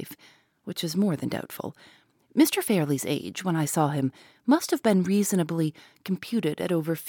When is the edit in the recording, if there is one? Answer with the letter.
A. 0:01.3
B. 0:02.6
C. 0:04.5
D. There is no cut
D